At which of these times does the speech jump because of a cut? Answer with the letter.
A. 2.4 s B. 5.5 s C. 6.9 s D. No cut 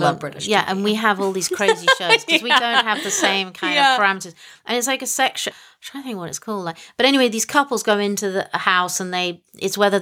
B